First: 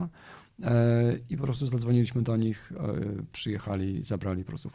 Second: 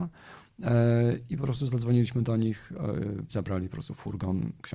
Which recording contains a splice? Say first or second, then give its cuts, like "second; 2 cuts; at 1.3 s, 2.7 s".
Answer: second; 1 cut; at 3.3 s